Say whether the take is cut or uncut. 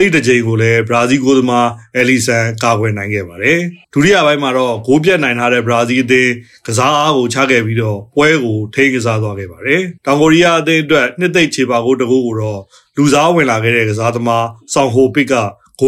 cut